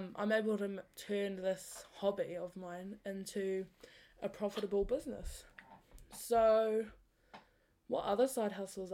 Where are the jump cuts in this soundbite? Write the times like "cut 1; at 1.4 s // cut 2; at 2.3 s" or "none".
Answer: none